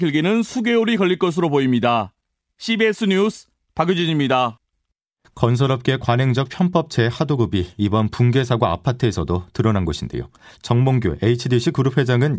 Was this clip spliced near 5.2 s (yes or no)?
yes